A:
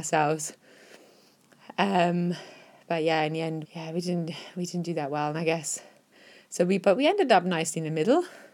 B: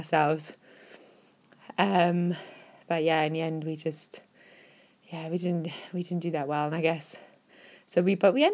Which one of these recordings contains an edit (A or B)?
A